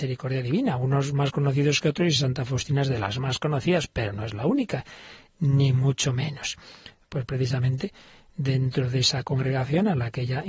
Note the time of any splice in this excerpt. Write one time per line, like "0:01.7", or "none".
0:07.0